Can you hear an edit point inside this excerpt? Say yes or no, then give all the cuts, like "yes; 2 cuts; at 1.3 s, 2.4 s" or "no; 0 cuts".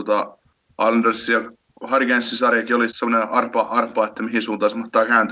yes; 1 cut; at 2.9 s